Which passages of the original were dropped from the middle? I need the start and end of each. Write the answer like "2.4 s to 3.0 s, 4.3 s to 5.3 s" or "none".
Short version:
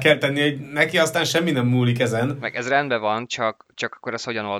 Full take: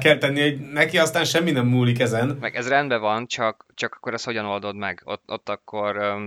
none